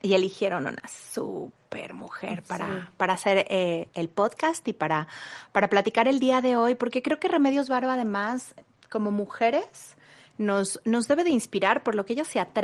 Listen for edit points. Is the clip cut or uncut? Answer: uncut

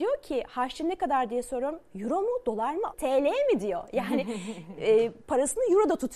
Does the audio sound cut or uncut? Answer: cut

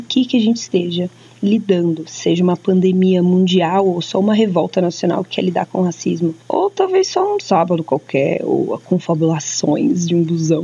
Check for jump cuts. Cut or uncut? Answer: uncut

